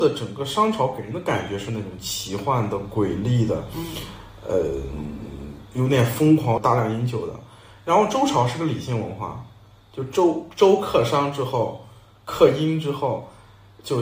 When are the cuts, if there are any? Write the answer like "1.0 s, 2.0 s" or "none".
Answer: 6.6 s